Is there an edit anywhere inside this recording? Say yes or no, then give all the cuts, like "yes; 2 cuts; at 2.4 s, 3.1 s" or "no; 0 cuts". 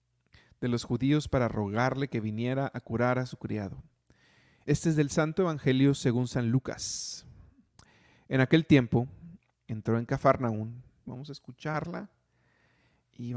yes; 3 cuts; at 4.7 s, 9.7 s, 11.0 s